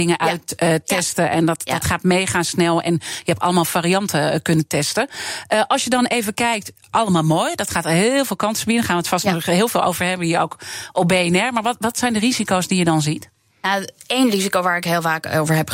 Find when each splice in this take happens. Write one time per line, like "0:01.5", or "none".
none